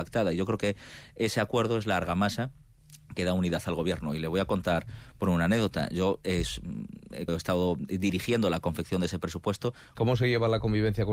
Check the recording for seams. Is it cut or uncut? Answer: cut